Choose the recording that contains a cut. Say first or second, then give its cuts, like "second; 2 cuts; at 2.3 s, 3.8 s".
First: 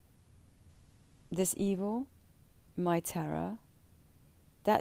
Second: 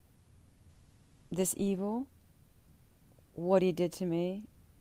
first; 1 cut; at 2.7 s